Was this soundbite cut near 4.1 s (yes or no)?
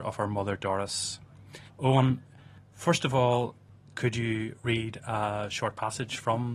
no